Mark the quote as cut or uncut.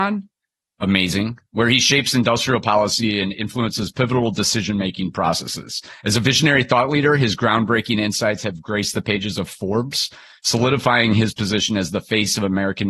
uncut